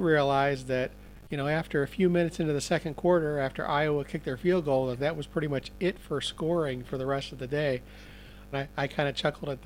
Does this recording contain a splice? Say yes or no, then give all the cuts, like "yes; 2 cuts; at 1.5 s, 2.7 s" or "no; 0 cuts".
yes; 1 cut; at 8.5 s